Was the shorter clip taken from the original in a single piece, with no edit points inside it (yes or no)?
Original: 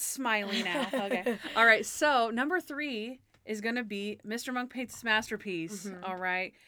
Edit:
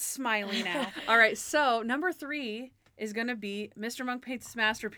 no